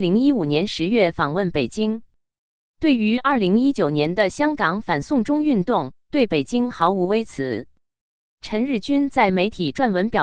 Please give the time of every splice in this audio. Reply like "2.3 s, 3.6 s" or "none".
6.0 s

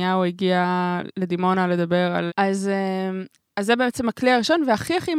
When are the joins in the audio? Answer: 2.3 s

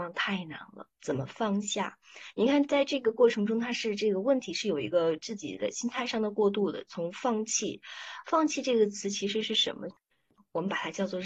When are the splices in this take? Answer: 9.9 s

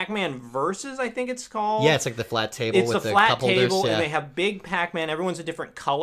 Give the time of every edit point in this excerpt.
none

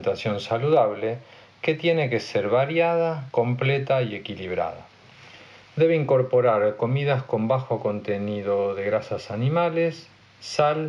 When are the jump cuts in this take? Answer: none

